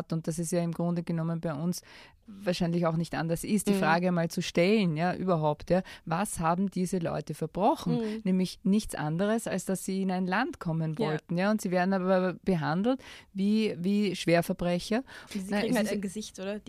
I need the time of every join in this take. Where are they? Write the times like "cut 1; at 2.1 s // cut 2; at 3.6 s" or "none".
cut 1; at 15.3 s